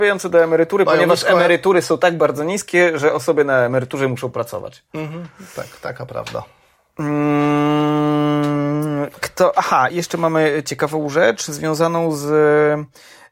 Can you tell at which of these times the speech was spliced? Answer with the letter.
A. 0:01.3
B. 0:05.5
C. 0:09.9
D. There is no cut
C